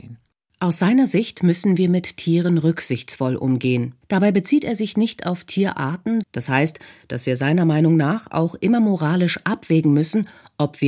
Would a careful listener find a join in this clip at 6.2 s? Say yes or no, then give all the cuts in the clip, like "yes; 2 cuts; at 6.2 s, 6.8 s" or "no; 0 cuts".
yes; 2 cuts; at 4.0 s, 6.2 s